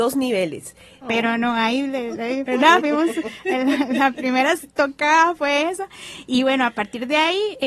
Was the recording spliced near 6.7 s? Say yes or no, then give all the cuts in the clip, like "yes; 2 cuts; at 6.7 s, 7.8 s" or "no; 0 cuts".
no; 2 cuts; at 1.0 s, 2.4 s